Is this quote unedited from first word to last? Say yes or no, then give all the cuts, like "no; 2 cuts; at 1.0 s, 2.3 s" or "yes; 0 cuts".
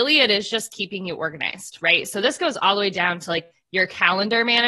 yes; 0 cuts